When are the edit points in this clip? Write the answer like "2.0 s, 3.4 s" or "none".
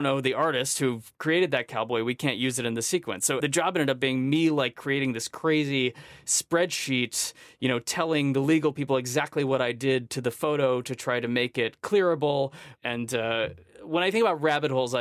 3.2 s

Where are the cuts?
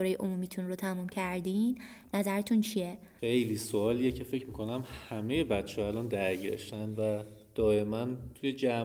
3.2 s

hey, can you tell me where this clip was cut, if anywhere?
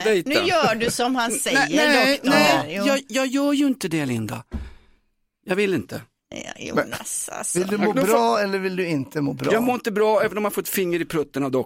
none

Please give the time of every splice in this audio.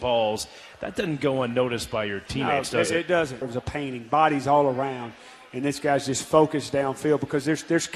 3.4 s

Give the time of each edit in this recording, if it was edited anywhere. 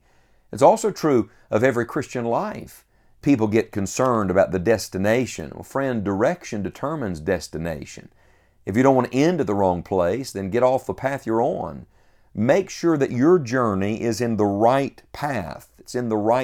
3.2 s

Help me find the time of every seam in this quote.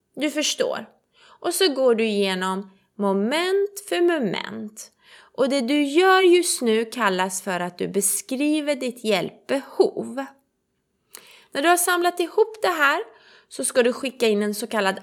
none

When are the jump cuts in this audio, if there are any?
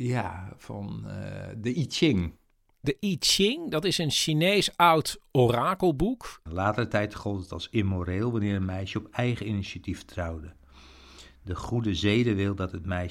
6.5 s

